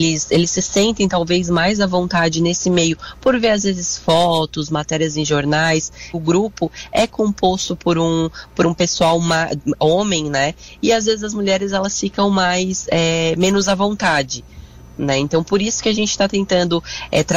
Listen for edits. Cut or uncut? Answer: cut